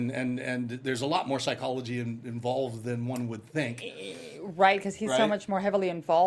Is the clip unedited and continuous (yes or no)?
yes